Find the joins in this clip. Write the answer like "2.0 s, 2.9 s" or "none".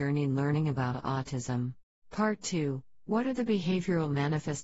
2.0 s